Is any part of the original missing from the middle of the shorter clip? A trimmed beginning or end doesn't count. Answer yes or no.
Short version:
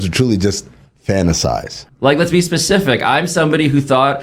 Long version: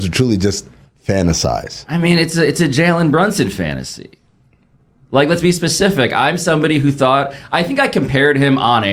yes